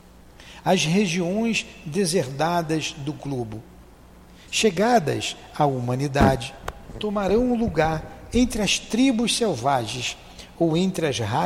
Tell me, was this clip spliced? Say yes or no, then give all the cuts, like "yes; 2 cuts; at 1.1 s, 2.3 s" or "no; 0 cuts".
yes; 1 cut; at 4.5 s